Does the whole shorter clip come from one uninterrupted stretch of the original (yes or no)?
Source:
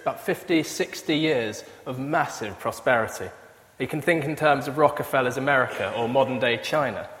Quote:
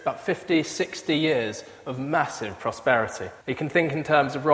no